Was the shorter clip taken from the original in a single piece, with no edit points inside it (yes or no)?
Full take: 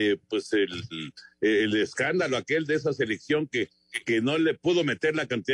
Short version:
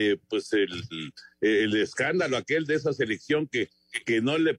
yes